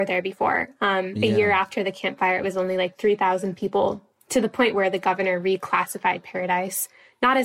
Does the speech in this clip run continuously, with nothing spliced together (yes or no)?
yes